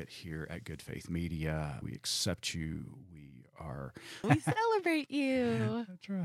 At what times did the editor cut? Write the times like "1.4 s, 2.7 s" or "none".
1.8 s, 4.2 s